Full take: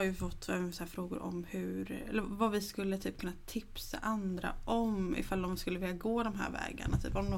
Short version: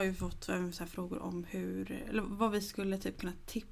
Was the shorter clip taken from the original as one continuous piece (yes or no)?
yes